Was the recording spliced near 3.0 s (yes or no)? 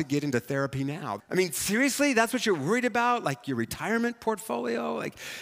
no